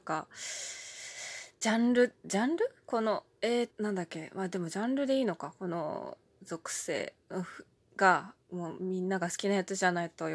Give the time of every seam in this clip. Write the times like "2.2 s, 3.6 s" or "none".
3.7 s, 8.4 s

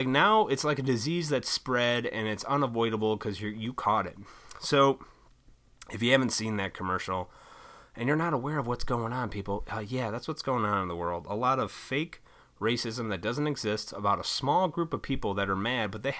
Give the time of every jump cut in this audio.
none

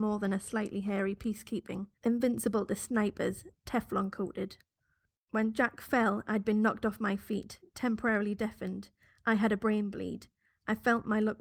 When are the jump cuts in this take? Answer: 2.0 s

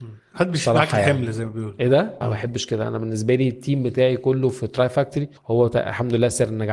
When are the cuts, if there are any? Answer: 2.2 s, 5.4 s

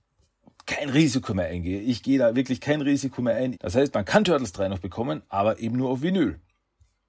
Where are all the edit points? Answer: 3.5 s

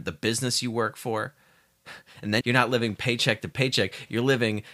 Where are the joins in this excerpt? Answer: 2.4 s

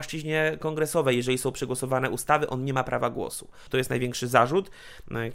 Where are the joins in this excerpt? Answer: 3.7 s

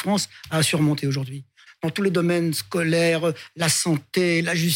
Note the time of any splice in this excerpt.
1.7 s

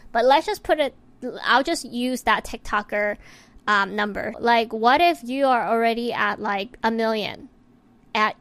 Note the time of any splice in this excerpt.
4.3 s

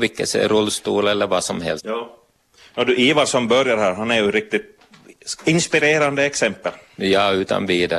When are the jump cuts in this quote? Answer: 1.8 s

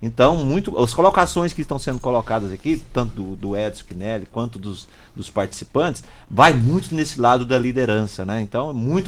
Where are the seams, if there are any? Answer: none

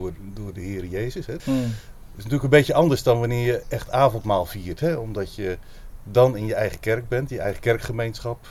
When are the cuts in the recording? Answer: 1.4 s

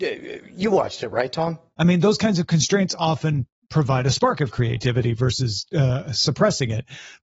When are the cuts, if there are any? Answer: 1.7 s

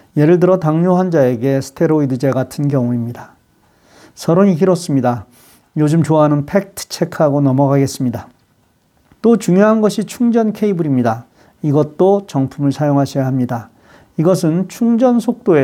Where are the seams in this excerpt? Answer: 9.2 s

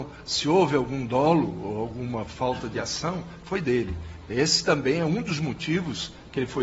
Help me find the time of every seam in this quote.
none

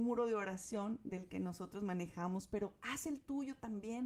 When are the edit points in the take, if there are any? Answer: none

